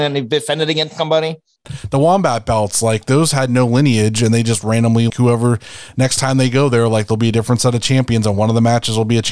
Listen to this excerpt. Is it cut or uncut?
cut